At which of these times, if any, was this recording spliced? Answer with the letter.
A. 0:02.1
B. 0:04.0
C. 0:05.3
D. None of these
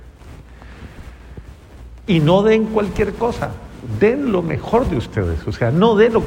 A